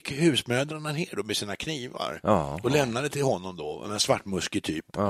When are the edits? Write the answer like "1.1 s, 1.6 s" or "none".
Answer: none